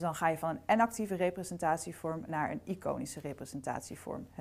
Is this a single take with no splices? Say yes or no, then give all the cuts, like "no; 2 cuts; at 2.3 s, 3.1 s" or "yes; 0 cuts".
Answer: no; 1 cut; at 2.3 s